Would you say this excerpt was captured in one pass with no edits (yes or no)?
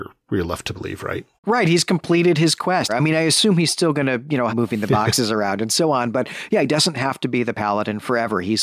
no